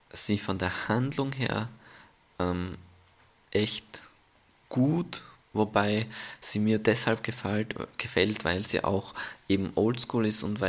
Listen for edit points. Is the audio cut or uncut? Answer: uncut